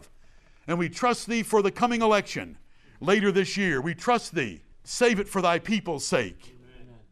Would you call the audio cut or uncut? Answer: cut